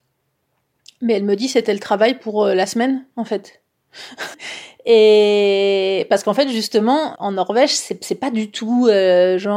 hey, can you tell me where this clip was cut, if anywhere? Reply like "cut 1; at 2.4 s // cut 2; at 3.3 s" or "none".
cut 1; at 4.3 s // cut 2; at 7.1 s